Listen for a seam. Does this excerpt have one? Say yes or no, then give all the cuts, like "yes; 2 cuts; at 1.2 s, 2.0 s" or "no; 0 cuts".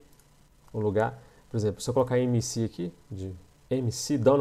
no; 0 cuts